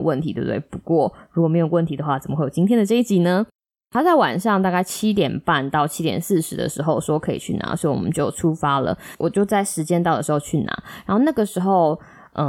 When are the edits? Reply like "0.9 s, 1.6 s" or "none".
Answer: none